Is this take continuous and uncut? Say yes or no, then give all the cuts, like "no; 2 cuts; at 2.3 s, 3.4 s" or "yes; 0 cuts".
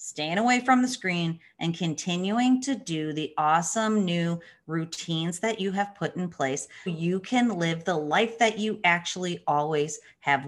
no; 1 cut; at 6.9 s